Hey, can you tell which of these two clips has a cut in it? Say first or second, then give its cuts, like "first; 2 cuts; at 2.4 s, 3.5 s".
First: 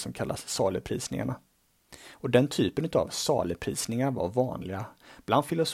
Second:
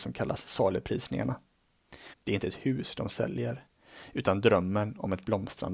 second; 1 cut; at 2.1 s